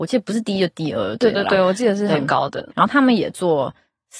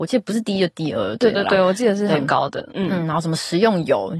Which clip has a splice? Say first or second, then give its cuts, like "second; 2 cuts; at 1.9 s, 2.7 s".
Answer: first; 1 cut; at 2.7 s